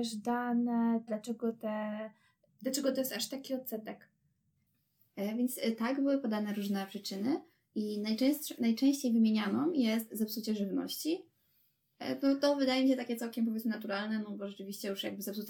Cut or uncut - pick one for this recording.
cut